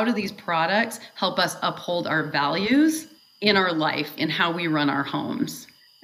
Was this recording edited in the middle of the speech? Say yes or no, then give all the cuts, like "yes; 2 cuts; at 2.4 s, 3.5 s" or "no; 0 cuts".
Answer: yes; 1 cut; at 4.2 s